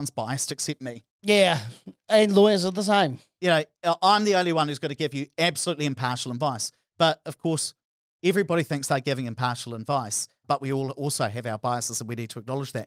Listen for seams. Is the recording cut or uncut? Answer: uncut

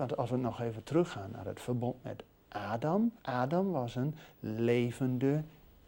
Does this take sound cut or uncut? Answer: cut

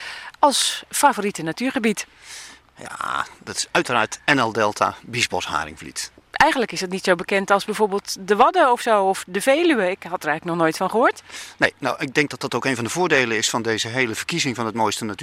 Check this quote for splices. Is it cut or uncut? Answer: uncut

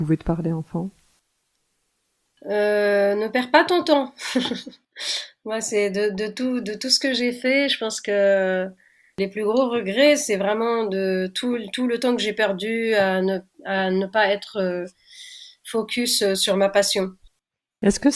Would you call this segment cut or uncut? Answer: uncut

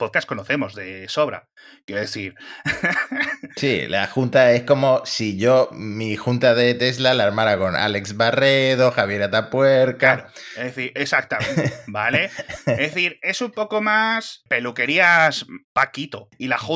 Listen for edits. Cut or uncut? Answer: uncut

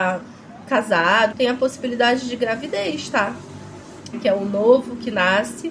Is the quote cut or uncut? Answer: cut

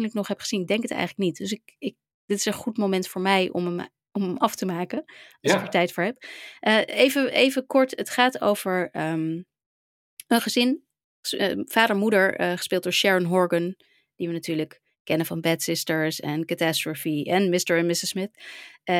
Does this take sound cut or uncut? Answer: uncut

